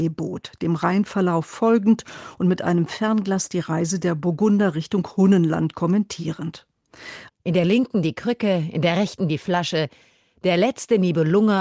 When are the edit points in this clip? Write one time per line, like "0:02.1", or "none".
0:07.3